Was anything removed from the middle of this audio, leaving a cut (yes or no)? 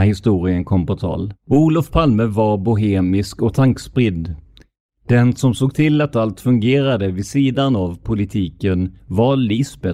yes